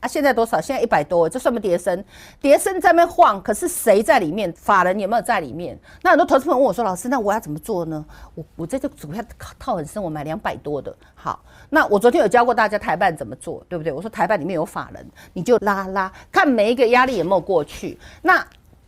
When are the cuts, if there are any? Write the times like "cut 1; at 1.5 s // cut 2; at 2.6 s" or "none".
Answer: cut 1; at 4.6 s // cut 2; at 15.6 s